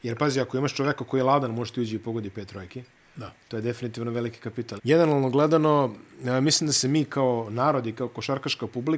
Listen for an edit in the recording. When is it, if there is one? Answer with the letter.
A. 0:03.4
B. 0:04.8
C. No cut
B